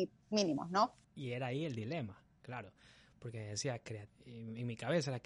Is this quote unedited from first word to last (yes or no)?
no